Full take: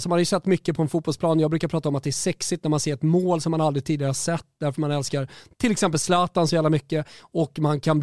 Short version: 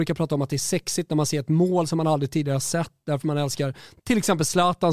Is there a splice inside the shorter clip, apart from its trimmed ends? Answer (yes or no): no